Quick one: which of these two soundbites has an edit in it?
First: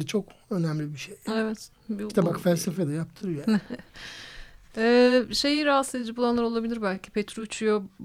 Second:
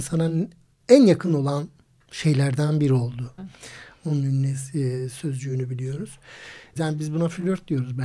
second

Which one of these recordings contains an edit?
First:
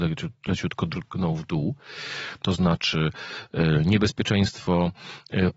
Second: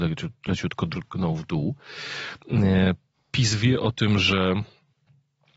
first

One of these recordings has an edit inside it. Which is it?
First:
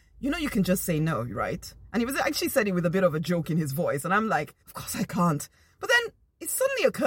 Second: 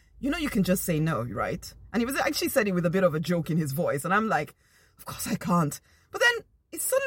first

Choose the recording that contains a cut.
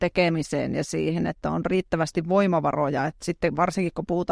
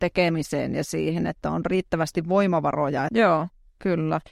second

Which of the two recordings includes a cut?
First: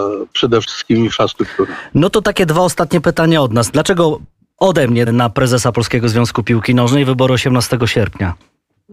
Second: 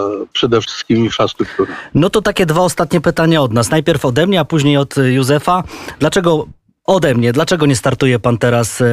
first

